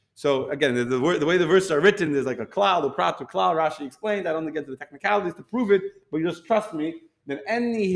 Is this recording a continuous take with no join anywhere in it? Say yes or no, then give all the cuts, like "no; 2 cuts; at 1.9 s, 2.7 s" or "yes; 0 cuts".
yes; 0 cuts